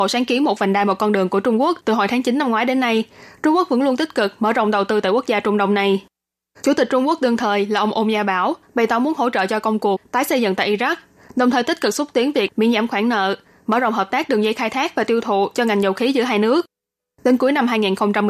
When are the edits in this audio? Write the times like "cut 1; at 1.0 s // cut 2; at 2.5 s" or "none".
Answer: cut 1; at 6.5 s